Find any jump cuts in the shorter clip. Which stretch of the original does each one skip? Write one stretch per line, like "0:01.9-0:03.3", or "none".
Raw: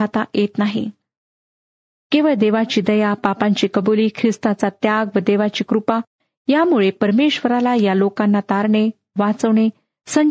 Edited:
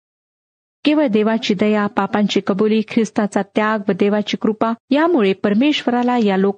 0:06.1-0:06.4